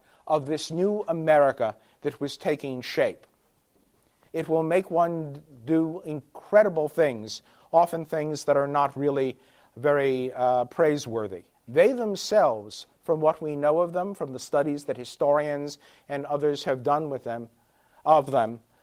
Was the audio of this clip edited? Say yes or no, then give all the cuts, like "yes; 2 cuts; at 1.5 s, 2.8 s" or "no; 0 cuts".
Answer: yes; 2 cuts; at 4.3 s, 11.5 s